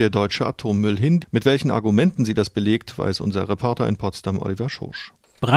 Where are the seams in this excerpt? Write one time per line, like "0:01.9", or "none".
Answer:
0:01.2